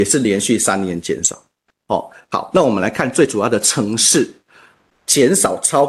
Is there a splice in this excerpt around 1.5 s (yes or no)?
no